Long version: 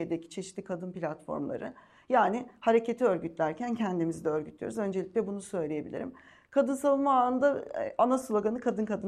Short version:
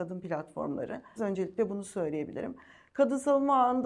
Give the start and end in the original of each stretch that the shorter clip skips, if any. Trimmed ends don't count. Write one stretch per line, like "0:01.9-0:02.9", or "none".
0:01.9-0:04.7